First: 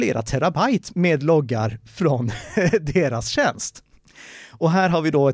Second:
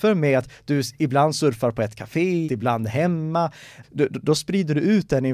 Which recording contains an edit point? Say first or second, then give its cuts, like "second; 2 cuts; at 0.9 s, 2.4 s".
second; 2 cuts; at 2.4 s, 3.8 s